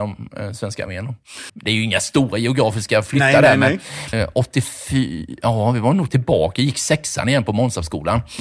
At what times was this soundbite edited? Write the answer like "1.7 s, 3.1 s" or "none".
1.5 s, 4.1 s